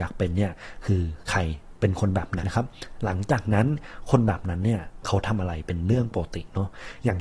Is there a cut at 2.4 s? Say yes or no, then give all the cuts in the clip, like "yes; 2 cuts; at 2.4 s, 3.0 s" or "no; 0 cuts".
yes; 1 cut; at 2.4 s